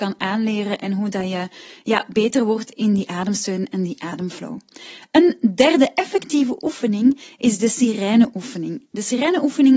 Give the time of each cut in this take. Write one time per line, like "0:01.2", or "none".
none